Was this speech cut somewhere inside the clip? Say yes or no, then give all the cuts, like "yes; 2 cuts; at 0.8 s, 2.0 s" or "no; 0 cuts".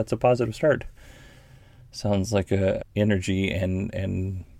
yes; 1 cut; at 2.8 s